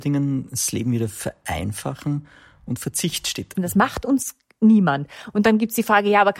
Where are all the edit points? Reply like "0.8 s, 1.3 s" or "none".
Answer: 3.5 s